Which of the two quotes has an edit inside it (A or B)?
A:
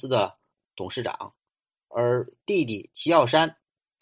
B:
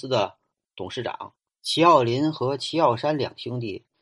B